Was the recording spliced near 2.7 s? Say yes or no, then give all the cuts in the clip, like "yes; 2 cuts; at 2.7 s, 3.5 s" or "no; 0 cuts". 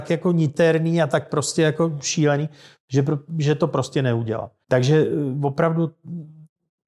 no; 1 cut; at 4.6 s